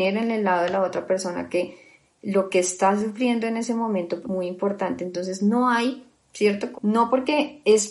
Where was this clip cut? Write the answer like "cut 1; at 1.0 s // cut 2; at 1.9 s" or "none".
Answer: cut 1; at 4.2 s // cut 2; at 6.7 s